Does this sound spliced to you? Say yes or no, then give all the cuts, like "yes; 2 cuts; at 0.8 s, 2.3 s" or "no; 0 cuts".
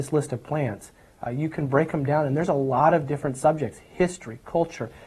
no; 0 cuts